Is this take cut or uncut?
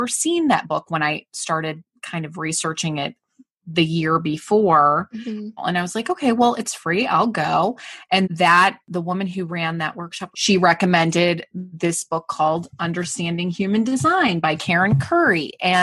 cut